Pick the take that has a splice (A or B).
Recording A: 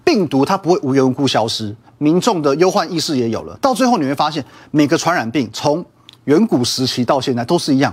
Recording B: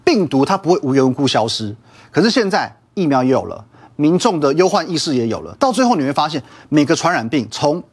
A